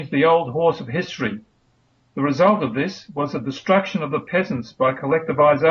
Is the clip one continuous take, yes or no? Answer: no